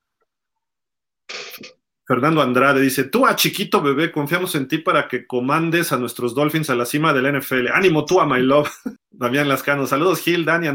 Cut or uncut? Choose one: cut